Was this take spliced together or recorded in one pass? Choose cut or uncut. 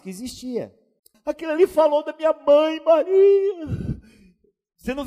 cut